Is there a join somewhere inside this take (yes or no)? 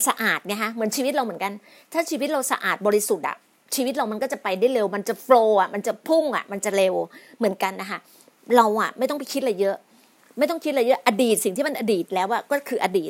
no